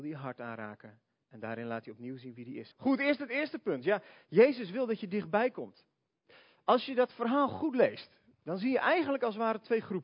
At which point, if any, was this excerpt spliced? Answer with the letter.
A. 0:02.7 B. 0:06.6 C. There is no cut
A